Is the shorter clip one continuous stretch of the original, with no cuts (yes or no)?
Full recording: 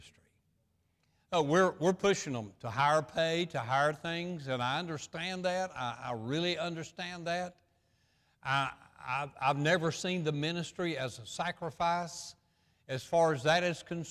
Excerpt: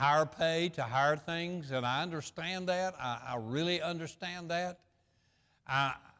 yes